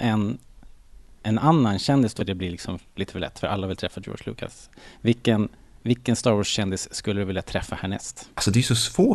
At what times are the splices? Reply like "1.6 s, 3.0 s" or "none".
2.2 s